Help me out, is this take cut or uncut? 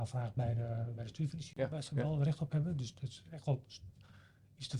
uncut